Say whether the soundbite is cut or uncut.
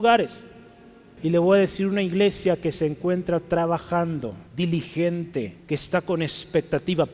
cut